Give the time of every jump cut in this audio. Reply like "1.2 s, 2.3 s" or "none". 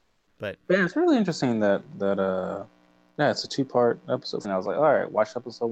4.4 s